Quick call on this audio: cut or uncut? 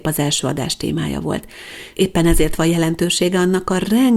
cut